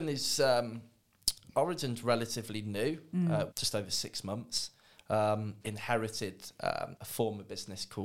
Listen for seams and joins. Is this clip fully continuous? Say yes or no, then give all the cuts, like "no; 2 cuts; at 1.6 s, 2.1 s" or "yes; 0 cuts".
no; 3 cuts; at 3.5 s, 5.6 s, 7.0 s